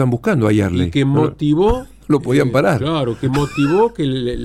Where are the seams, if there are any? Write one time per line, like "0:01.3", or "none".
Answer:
none